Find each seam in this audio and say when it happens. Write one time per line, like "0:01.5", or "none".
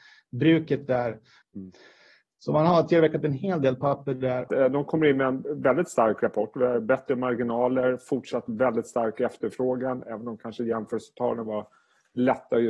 0:01.4
0:04.5

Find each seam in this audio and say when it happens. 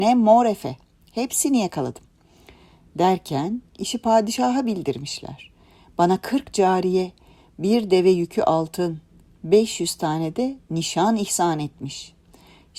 none

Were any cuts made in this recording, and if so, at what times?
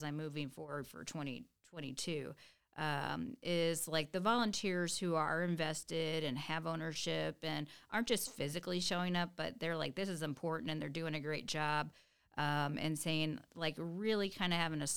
none

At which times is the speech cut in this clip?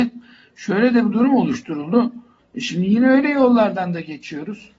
0:02.4

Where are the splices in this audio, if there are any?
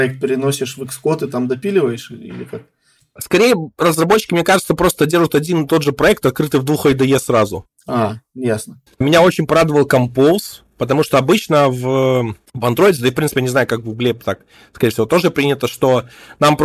0:08.9

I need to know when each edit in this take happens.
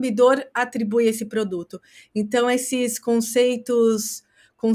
none

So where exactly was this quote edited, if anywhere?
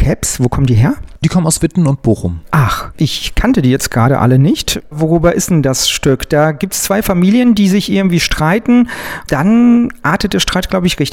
none

